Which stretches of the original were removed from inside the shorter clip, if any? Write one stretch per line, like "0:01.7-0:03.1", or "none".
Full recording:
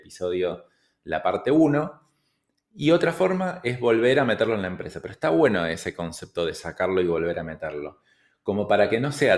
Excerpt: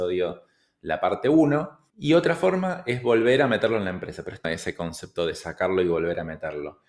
0:02.1-0:02.7
0:05.2-0:05.6